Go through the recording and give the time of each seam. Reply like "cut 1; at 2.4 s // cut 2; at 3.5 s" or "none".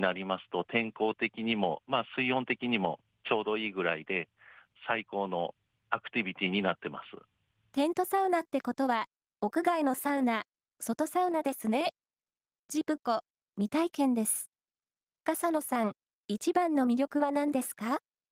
none

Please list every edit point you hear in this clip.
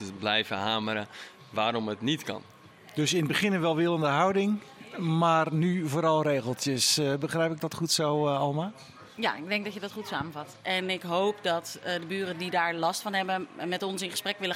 cut 1; at 10.6 s

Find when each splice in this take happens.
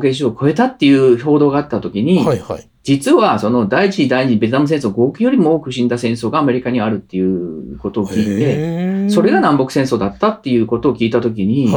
cut 1; at 2.8 s

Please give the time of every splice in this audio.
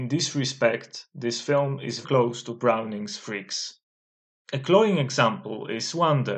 cut 1; at 2.0 s

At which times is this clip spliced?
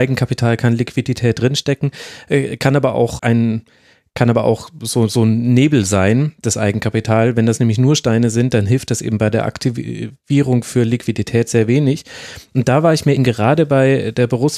cut 1; at 3.2 s // cut 2; at 13.2 s

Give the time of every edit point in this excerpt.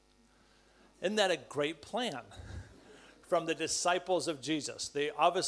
none

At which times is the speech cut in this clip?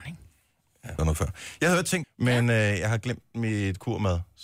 cut 1; at 1.0 s // cut 2; at 2.0 s

